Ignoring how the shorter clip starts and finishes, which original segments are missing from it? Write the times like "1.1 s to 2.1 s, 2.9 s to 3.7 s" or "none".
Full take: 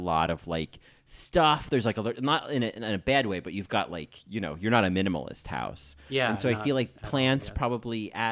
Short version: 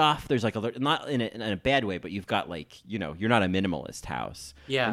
none

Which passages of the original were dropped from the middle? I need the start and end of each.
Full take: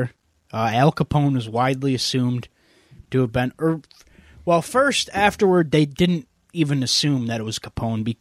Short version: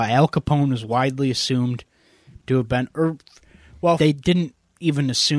4.6 s to 5.7 s

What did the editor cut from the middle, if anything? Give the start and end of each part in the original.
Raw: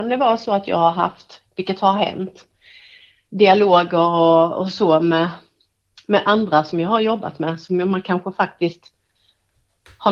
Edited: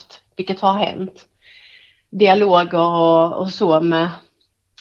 none

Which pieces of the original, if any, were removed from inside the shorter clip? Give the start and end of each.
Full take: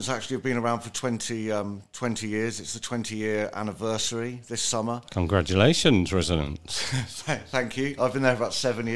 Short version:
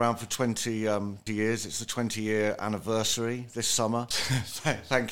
1.9 s to 2.2 s, 5.0 s to 6.7 s

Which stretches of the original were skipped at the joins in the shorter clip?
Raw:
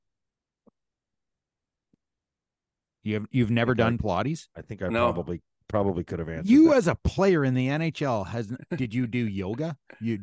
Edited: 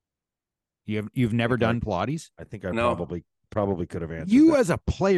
none

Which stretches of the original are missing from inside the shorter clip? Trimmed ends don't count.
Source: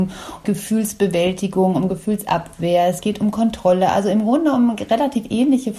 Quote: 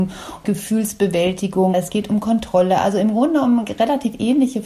1.7 s to 2.8 s

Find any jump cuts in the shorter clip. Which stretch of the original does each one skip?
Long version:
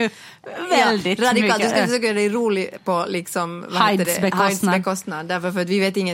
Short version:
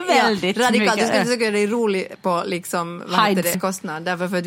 4.2 s to 4.8 s

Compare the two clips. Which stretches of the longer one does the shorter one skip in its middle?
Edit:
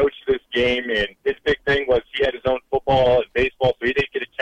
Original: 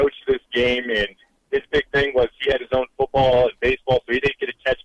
1.2 s to 1.4 s

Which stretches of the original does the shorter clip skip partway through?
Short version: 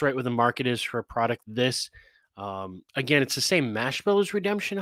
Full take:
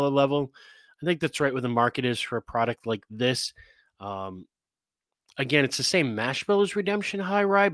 2.8 s to 3.1 s, 4.5 s to 5.3 s

